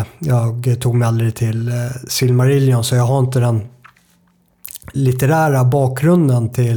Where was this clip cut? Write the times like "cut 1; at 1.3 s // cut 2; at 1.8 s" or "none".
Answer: cut 1; at 4.9 s